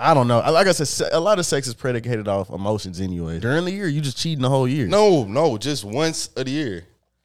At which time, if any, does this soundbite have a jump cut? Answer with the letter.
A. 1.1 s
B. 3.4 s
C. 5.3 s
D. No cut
B